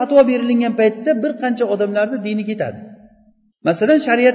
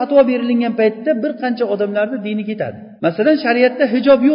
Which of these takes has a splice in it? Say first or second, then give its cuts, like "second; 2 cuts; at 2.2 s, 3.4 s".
second; 1 cut; at 3.0 s